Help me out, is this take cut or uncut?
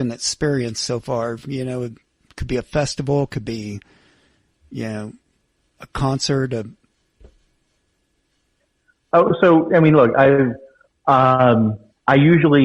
uncut